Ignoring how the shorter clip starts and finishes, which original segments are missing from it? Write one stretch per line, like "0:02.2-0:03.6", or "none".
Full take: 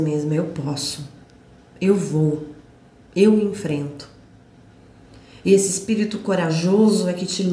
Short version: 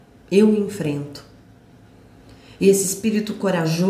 none